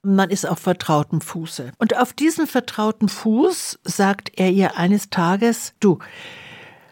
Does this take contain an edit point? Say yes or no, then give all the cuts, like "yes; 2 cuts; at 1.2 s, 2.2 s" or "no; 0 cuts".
yes; 1 cut; at 1.7 s